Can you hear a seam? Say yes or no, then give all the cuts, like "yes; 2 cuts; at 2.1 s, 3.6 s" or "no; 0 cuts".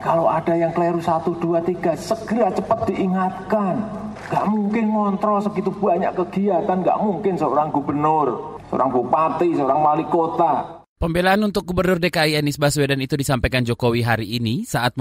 no; 0 cuts